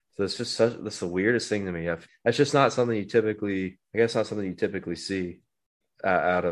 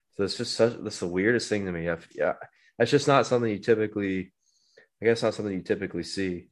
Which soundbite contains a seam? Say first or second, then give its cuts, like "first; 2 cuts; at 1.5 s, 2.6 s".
first; 2 cuts; at 2.1 s, 3.8 s